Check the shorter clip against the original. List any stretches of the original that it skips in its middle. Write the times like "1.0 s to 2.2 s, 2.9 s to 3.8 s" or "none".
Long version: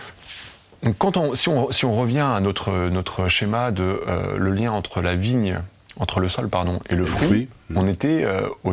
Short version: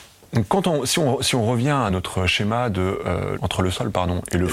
2.4 s to 2.9 s, 4.4 s to 5.9 s